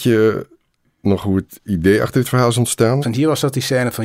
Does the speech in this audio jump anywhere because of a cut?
yes; 1 cut; at 3.0 s

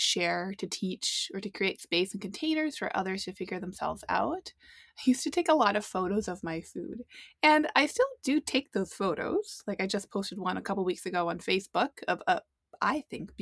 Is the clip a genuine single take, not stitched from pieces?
yes; 0 cuts

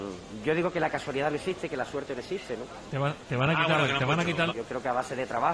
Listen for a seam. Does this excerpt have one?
yes; 2 cuts; at 2.9 s, 4.5 s

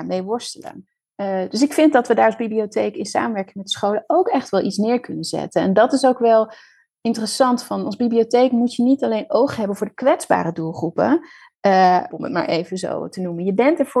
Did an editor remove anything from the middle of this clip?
yes; 1 cut; at 12.1 s

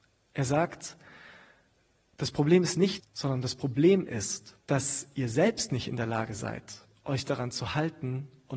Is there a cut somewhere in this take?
yes; 2 cuts; at 3.0 s, 4.6 s

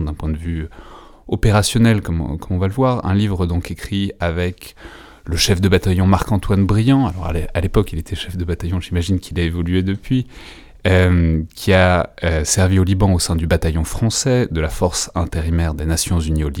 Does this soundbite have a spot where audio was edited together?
no; 0 cuts

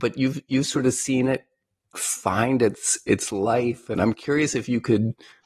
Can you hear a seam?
no; 0 cuts

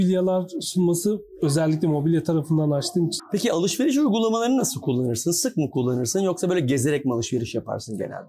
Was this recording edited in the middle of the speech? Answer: yes; 1 cut; at 3.2 s

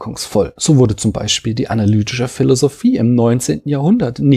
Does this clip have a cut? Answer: no; 0 cuts

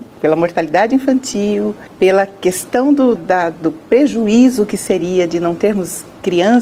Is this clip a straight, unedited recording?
no; 1 cut; at 3.2 s

